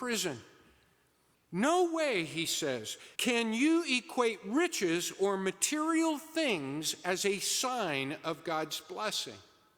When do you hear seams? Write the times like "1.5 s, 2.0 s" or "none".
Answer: 1.3 s, 3.1 s